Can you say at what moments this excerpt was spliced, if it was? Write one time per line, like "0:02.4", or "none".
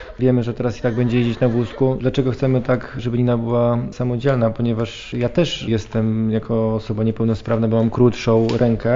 0:02.0